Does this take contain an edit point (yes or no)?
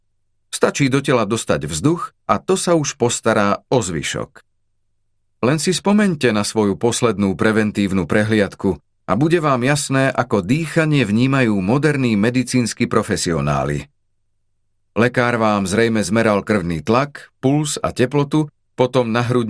no